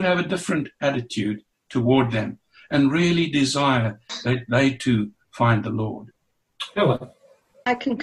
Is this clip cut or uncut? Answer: uncut